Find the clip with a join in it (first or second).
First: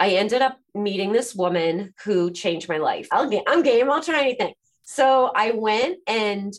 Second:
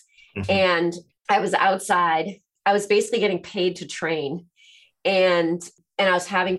first